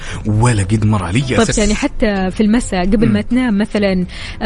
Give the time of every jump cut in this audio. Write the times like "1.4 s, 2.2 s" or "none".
1.5 s